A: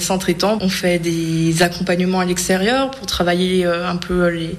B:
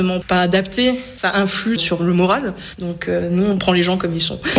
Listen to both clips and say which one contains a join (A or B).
B